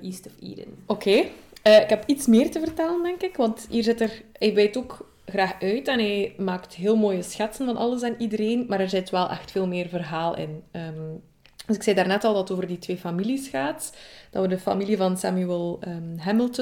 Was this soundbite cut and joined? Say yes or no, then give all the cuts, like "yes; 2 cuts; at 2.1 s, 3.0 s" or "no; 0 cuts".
no; 0 cuts